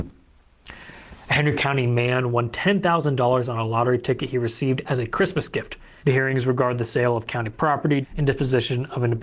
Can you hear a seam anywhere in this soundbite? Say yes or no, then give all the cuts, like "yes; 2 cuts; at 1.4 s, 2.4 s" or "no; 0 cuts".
yes; 2 cuts; at 6.0 s, 8.0 s